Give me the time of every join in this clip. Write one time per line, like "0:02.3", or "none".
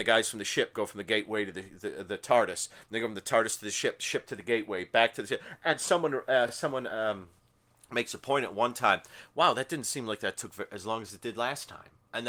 none

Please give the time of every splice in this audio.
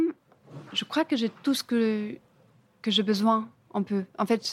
none

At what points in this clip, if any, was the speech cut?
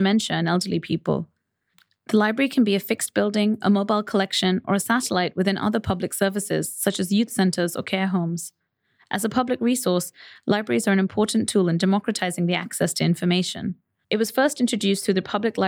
0:14.0

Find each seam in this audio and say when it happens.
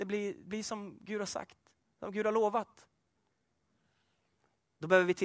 none

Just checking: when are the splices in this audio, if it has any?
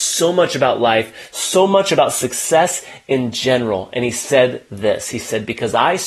0:01.3

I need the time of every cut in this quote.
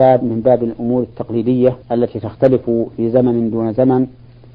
0:01.8

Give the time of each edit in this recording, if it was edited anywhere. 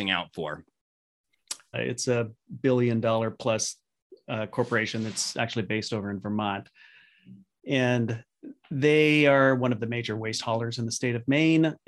0:01.7

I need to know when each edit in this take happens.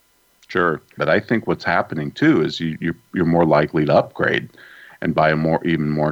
0:01.0

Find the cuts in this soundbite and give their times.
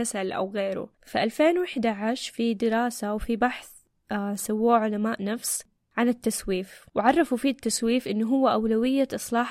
0:01.0

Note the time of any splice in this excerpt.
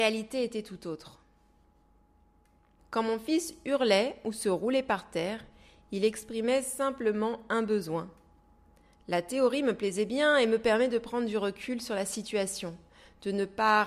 0:02.8

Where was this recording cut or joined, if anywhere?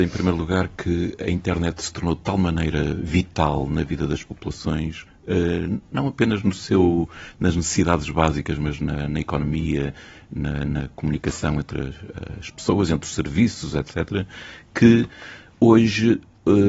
none

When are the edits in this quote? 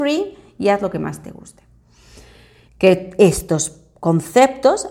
0:02.7

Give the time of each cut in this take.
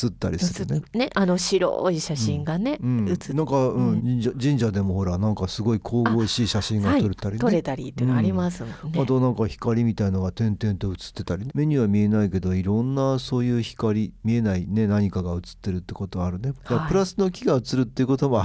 0:04.0
0:11.5

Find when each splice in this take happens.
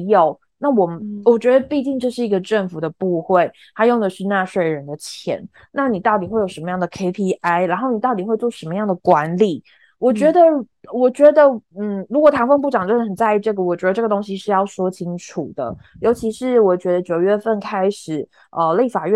none

